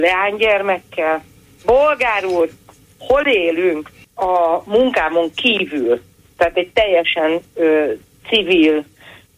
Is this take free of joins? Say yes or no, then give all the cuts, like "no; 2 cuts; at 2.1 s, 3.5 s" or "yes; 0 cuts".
no; 1 cut; at 4.0 s